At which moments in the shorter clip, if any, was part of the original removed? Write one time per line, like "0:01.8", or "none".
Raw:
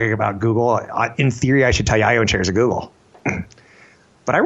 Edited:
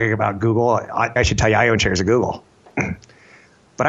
0:01.2

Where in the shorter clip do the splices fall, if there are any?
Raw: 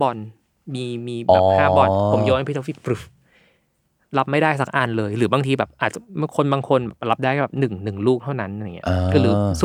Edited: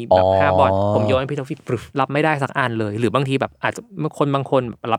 0:01.9

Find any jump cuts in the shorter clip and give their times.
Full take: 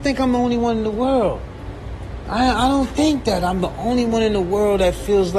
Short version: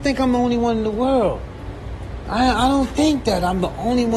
none

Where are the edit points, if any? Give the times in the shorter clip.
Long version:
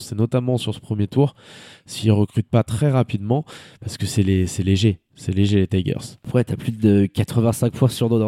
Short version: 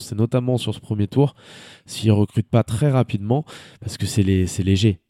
none

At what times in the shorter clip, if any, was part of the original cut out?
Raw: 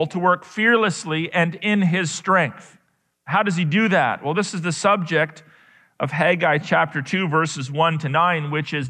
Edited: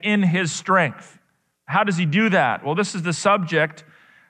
none

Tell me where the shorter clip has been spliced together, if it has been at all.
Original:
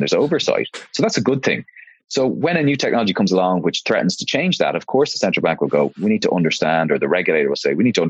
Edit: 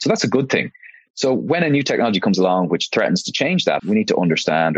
0:03.8

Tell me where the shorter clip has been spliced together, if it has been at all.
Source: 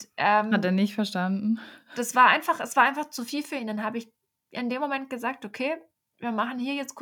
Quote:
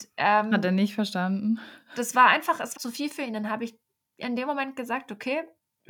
0:02.8

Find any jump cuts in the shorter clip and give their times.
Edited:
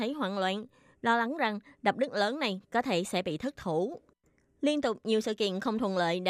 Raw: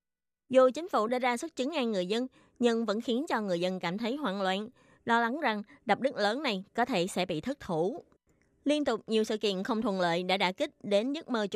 none

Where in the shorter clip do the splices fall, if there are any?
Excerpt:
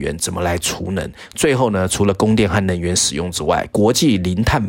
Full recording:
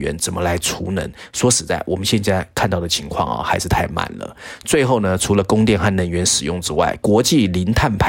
0:01.3

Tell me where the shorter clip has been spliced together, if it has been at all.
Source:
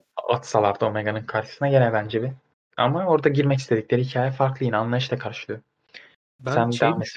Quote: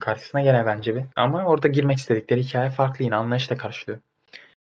0:01.1

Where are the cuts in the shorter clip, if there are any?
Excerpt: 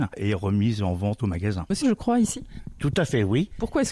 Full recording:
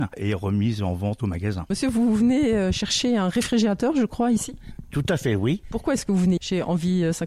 0:01.8

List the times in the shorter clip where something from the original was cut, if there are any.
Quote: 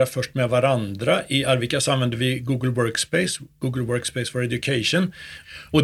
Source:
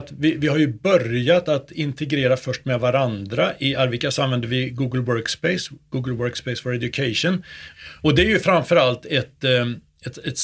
none

